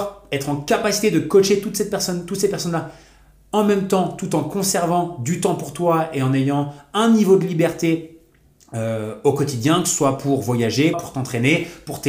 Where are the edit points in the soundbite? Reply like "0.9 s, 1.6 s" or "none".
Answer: 10.9 s